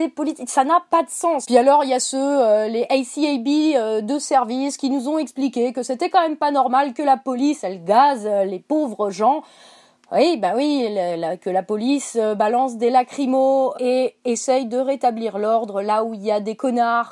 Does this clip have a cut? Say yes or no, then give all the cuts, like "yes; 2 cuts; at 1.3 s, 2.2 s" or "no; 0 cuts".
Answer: yes; 1 cut; at 13.7 s